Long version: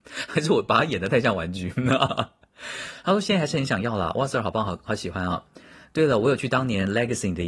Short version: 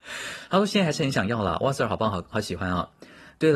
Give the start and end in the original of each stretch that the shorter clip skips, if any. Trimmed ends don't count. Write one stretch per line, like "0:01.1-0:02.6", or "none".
none